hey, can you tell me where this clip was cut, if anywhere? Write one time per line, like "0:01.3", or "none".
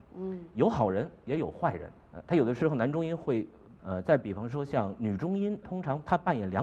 0:02.0
0:03.8
0:05.6